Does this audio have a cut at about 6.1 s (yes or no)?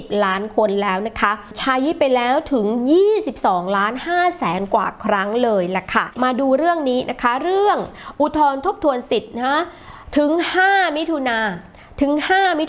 yes